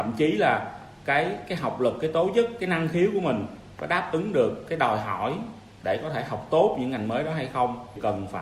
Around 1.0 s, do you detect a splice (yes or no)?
no